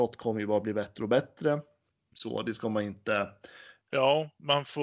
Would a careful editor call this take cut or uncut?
cut